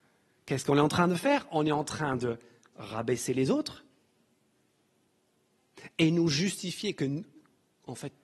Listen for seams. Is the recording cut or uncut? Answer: uncut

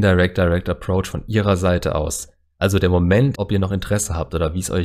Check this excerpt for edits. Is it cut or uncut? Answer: cut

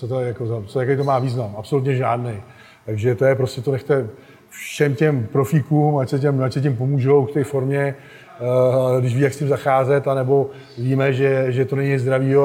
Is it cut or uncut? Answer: uncut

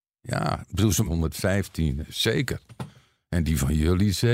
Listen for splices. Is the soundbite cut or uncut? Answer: cut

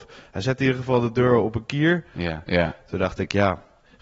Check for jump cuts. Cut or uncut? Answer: cut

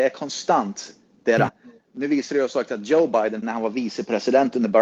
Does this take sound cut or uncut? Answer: cut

